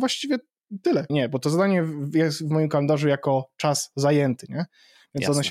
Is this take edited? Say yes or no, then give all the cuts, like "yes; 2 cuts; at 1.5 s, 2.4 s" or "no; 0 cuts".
yes; 1 cut; at 1.1 s